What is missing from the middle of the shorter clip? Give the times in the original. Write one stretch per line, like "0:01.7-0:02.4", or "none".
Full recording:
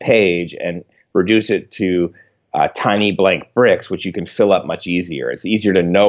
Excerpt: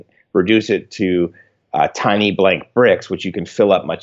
none